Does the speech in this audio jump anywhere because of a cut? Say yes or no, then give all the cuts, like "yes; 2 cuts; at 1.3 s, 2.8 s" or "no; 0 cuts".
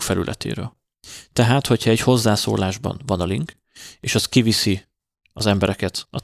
no; 0 cuts